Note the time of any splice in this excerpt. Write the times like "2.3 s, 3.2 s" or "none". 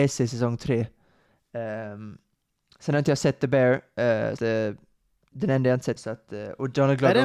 4.4 s, 6.0 s